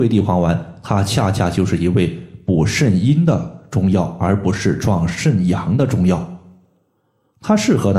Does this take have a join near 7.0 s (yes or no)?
no